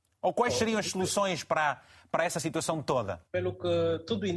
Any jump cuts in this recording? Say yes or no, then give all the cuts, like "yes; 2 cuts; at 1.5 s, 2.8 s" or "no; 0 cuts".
yes; 1 cut; at 3.2 s